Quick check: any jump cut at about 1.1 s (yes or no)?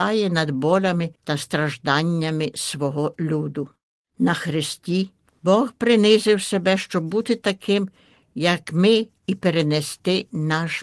yes